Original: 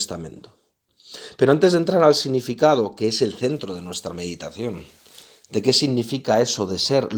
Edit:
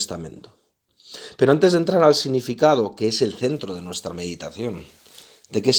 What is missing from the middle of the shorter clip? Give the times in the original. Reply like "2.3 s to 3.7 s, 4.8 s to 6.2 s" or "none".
none

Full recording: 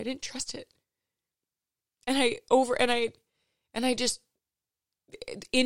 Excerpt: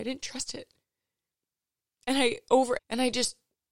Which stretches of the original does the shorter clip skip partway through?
2.8 s to 3.6 s

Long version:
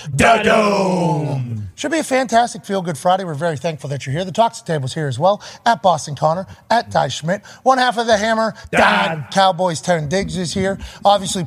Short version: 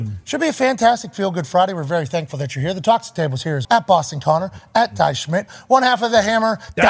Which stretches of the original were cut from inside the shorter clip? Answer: 5.2 s to 5.6 s

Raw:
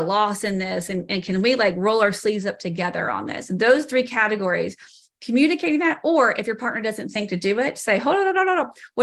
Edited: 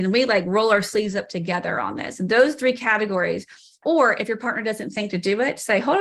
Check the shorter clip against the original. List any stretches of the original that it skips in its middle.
5.1 s to 6.0 s

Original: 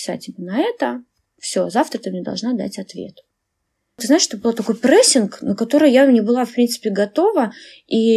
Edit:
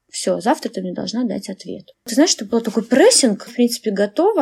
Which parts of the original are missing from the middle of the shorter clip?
3.2 s to 3.8 s, 5.4 s to 6.5 s

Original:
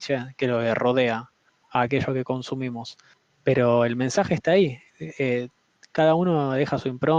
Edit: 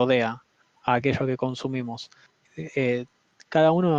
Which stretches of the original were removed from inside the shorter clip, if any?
3.3 s to 4.9 s

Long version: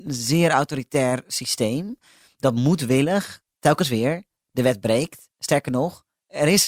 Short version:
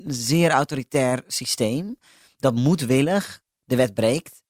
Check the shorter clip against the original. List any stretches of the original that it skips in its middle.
3.5 s to 4.4 s

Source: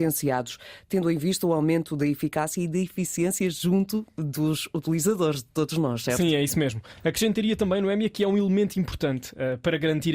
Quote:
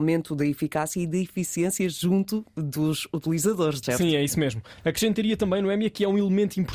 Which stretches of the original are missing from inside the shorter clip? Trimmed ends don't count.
5.4 s to 6.0 s

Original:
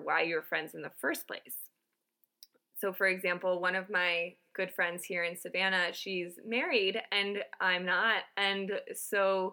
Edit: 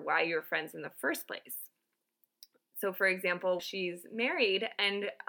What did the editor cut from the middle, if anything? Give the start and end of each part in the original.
3.6 s to 5.9 s

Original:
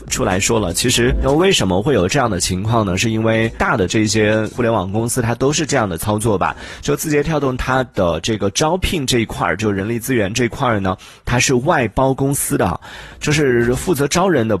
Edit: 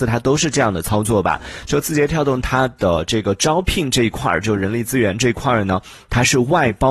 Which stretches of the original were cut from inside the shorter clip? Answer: none

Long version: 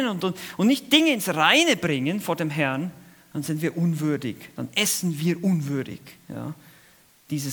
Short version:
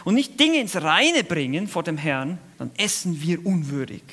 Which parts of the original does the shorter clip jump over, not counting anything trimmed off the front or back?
3.1 s to 4.5 s

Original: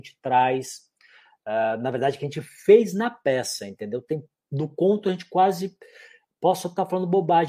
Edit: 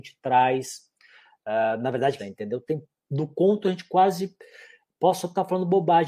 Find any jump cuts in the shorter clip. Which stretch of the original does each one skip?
2.2 s to 3.6 s

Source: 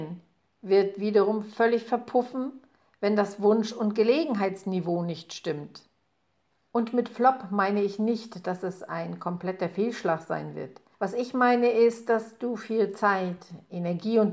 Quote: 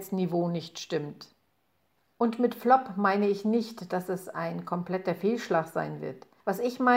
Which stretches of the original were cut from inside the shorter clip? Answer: none

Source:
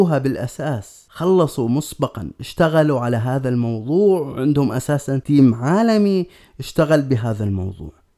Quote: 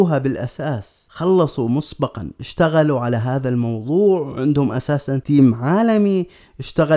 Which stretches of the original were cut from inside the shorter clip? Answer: none

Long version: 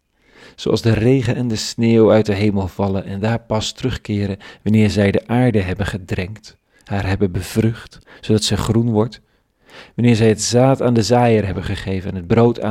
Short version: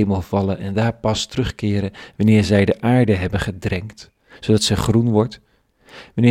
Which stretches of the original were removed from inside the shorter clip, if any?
6.8 s to 8.1 s

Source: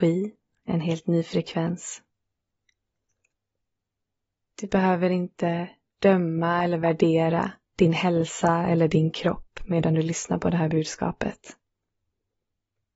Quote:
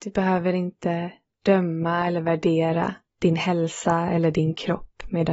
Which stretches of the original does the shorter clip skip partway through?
none

